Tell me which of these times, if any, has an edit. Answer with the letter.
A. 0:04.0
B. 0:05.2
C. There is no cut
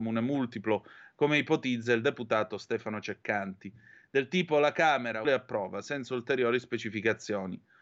B